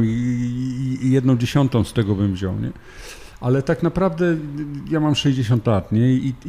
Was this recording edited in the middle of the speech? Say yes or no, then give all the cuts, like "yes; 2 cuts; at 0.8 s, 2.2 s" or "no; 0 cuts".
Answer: no; 0 cuts